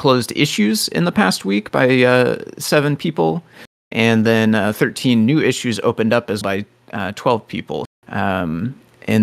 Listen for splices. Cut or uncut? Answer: cut